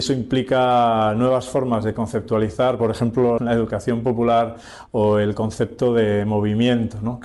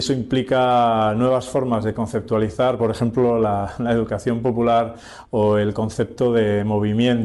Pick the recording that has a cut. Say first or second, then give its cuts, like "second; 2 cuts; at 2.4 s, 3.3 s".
first; 1 cut; at 3.4 s